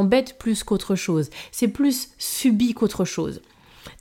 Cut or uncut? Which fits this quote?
uncut